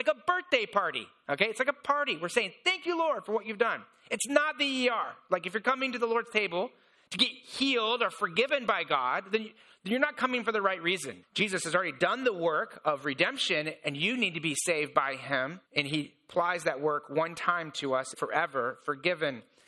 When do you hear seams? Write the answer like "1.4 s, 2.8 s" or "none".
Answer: 11.2 s, 15.6 s, 18.1 s